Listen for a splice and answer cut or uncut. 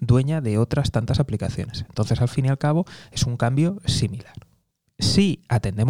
uncut